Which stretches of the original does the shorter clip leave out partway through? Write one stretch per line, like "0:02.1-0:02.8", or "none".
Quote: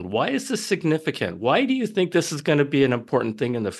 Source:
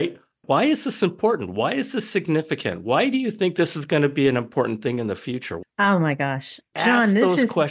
none